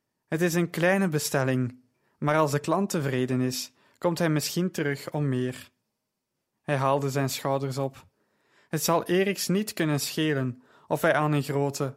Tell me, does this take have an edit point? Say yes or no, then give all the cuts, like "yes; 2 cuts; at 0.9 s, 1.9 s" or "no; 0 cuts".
no; 0 cuts